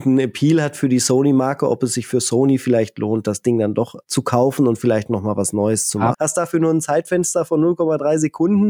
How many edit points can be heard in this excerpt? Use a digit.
2